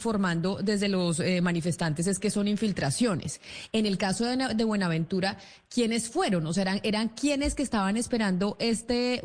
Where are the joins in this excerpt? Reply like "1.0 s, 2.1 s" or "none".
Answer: none